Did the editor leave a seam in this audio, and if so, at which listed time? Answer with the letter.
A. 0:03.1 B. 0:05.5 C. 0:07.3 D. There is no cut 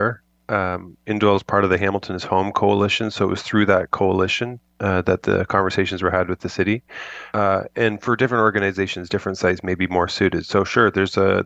C